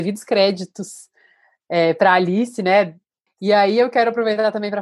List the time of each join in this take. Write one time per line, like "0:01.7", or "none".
0:03.3

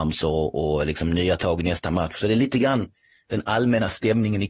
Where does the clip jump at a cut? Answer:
none

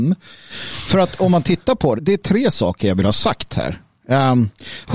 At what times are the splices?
0:02.0

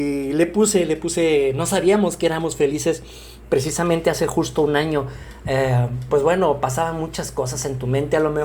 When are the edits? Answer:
none

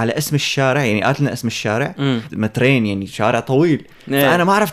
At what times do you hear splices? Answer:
0:02.3

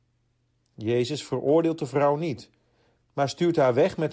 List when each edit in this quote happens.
none

